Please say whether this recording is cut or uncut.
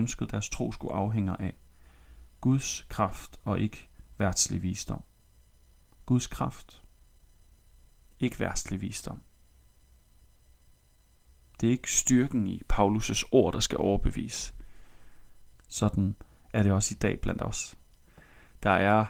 cut